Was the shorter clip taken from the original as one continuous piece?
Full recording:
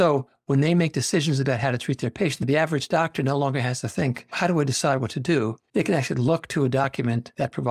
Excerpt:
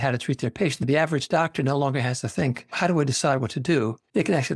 yes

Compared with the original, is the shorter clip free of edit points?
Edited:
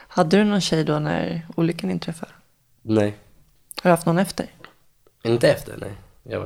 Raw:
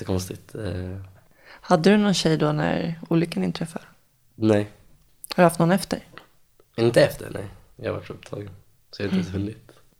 yes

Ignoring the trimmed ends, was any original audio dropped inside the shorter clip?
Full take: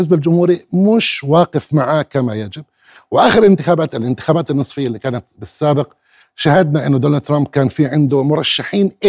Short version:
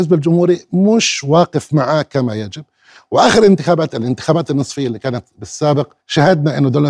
yes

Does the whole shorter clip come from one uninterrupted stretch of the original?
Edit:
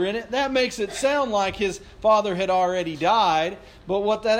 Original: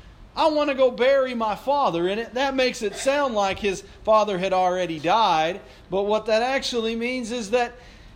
yes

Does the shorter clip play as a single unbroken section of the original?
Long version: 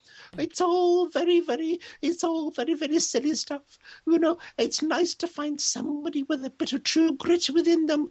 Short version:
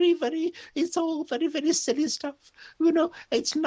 yes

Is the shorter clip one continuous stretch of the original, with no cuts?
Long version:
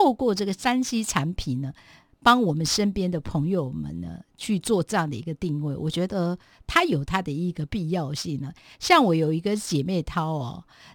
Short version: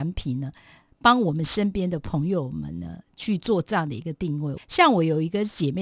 no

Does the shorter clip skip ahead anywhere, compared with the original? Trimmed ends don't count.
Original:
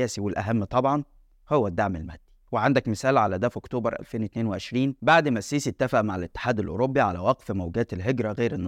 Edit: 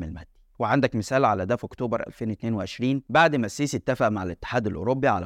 no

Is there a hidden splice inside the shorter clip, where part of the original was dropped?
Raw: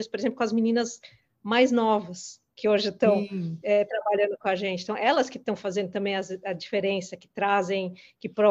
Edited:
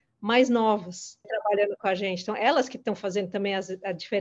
yes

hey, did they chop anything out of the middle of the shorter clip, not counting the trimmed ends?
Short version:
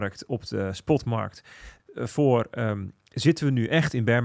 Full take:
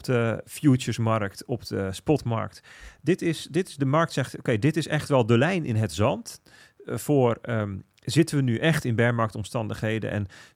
yes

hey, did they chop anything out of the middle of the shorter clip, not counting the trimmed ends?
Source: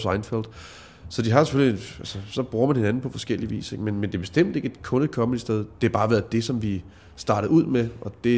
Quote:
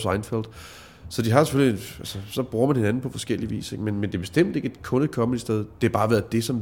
no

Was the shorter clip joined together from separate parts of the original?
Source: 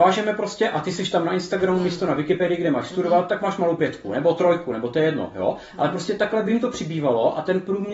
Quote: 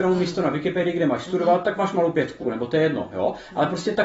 yes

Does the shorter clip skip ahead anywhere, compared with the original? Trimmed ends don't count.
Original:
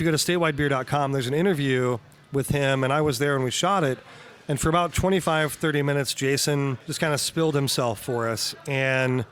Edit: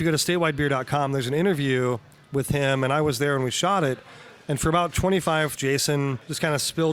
yes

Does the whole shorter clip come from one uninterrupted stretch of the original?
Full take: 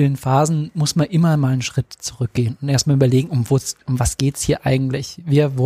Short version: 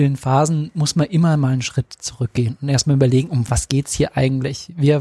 no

